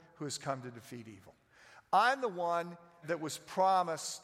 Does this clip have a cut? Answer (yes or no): yes